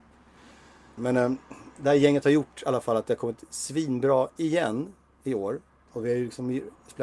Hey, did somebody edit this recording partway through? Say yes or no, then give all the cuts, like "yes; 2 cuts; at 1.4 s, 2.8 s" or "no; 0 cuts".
yes; 2 cuts; at 1.0 s, 5.9 s